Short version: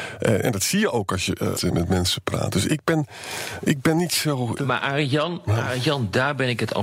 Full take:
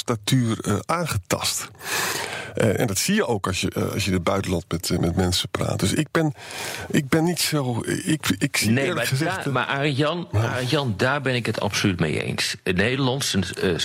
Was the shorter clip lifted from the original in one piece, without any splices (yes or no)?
no